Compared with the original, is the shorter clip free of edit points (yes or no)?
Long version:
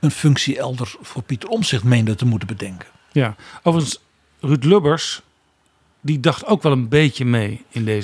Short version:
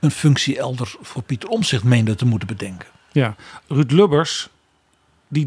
no